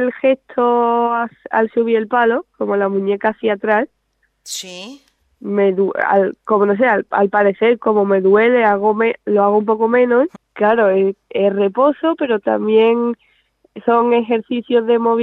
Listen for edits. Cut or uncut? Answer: cut